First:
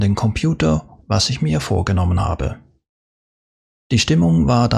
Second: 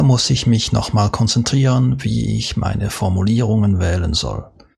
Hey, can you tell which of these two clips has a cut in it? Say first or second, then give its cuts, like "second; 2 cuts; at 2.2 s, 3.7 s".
first; 2 cuts; at 1.0 s, 3.7 s